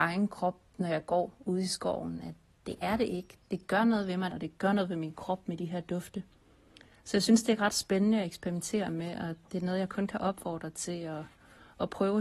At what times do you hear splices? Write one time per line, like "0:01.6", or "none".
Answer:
0:04.3